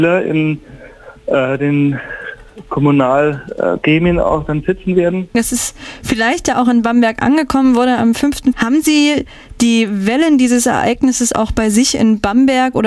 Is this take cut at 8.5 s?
yes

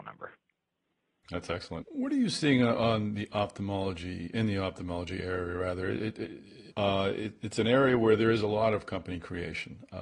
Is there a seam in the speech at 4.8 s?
no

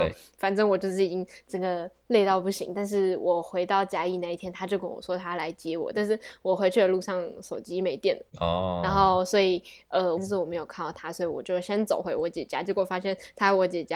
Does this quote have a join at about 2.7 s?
no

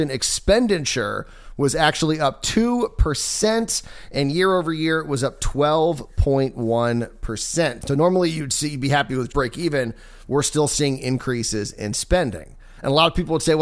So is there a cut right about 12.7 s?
no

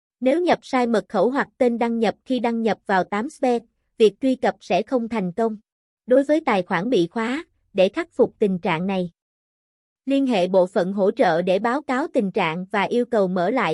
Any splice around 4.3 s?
no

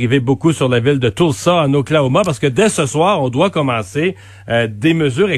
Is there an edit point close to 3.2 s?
no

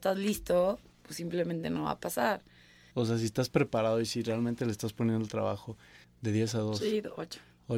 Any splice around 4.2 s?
no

